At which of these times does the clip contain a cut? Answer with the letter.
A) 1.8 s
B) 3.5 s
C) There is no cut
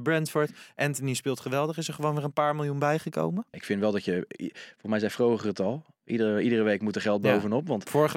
B